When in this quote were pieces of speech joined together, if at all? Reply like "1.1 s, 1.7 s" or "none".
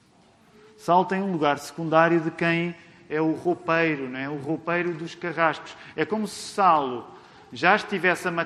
none